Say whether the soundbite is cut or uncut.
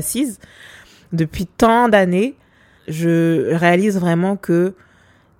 cut